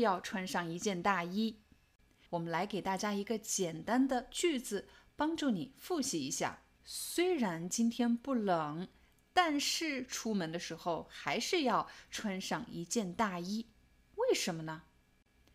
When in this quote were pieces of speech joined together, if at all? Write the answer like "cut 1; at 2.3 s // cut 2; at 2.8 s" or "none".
cut 1; at 2.3 s // cut 2; at 6.8 s

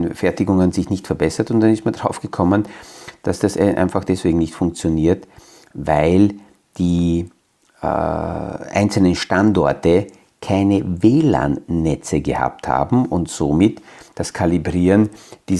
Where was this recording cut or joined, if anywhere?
none

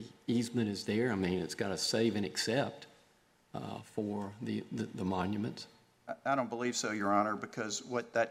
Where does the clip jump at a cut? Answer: none

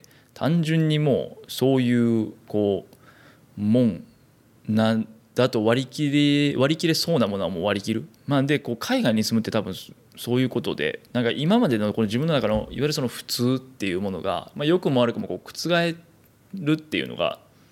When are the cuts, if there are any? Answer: cut 1; at 8.2 s

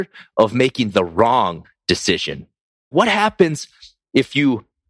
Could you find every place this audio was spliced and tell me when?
cut 1; at 2.9 s

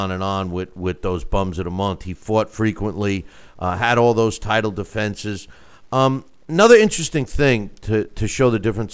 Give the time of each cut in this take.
none

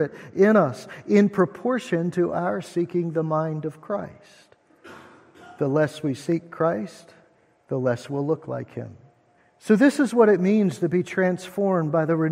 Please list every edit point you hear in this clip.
cut 1; at 9.4 s

